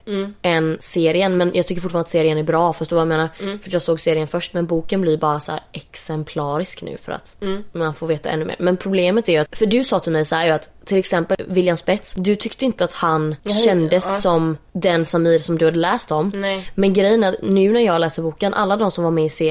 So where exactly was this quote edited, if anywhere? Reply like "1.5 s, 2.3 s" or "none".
none